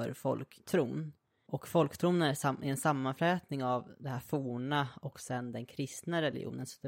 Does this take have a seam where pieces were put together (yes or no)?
no